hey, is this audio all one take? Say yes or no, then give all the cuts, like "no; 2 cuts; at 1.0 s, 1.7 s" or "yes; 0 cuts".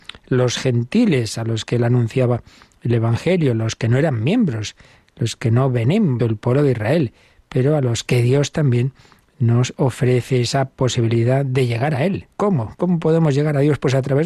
no; 1 cut; at 6.2 s